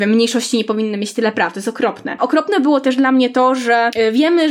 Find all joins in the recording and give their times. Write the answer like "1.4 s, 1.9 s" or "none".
2.2 s